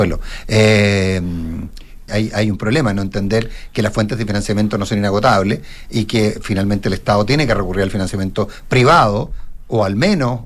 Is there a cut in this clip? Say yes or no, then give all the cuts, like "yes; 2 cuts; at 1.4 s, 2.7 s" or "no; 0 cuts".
yes; 1 cut; at 2.1 s